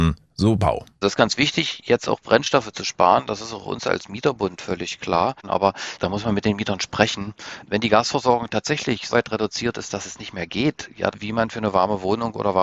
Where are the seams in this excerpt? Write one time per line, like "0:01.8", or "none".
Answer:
0:09.1
0:11.1